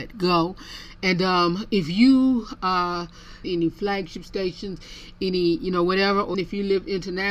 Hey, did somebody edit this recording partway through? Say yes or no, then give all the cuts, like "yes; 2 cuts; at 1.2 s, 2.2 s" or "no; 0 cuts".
yes; 2 cuts; at 3.4 s, 6.3 s